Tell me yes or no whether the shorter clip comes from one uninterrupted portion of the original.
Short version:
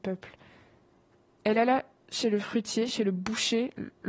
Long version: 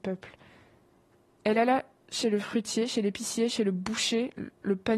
no